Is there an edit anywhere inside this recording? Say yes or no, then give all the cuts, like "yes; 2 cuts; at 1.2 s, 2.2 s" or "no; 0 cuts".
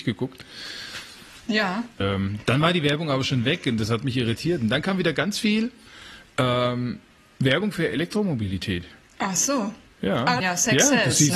yes; 2 cuts; at 2.0 s, 10.4 s